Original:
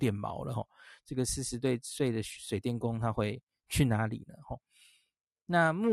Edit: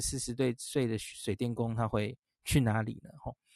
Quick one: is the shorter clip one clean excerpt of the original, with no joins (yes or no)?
yes